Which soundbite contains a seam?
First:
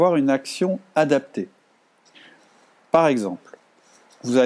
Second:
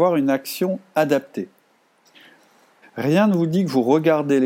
second; 1 cut; at 2.8 s

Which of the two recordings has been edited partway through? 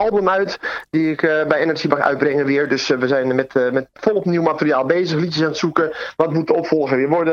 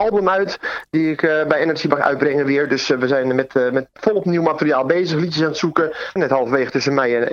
second; 1 cut; at 6.2 s

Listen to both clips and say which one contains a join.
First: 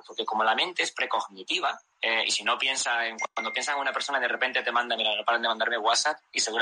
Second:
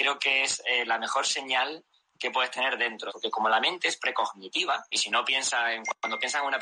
second; 2 cuts; at 3.1 s, 4.9 s

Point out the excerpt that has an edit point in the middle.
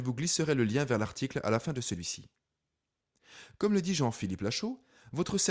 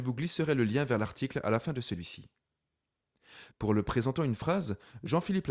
second; 1 cut; at 3.5 s

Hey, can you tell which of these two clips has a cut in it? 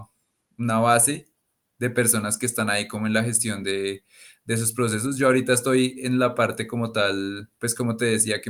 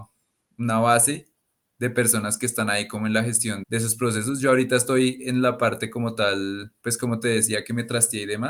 second; 1 cut; at 3.6 s

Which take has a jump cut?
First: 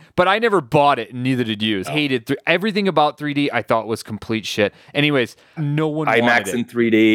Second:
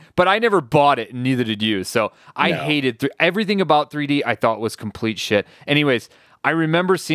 first; 2 cuts; at 1.8 s, 5.6 s

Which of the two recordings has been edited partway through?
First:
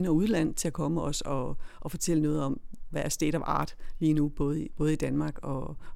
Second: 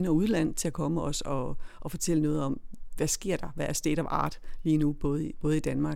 first; 1 cut; at 2.9 s

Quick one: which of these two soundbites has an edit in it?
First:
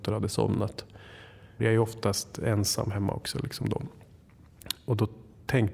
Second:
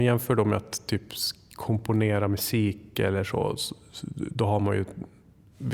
first; 1 cut; at 1.6 s

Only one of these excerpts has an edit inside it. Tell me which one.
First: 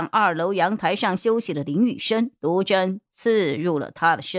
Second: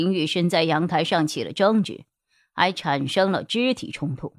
first; 1 cut; at 2.4 s

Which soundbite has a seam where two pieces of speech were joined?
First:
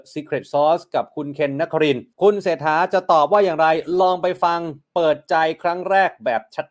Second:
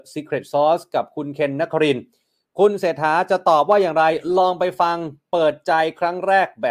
first; 1 cut; at 2.1 s

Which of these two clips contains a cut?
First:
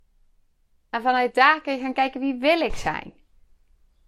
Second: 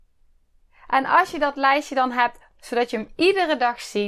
second; 1 cut; at 2.6 s

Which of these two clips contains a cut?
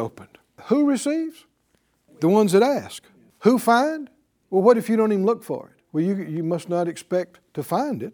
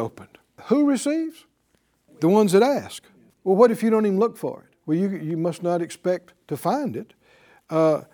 second; 1 cut; at 3.3 s

